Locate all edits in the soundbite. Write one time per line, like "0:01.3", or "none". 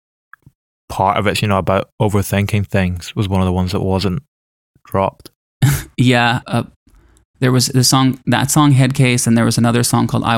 0:06.4